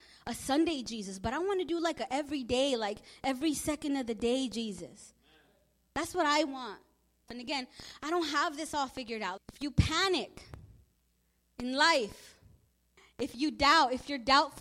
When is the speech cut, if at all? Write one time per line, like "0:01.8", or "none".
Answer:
0:07.3
0:09.4